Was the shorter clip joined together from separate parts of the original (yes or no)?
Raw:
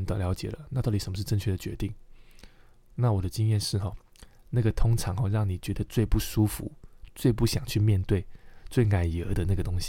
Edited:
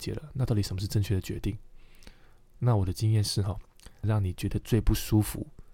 yes